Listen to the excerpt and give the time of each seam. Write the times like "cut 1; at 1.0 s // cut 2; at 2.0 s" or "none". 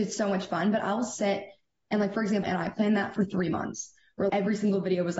cut 1; at 2.4 s // cut 2; at 4.3 s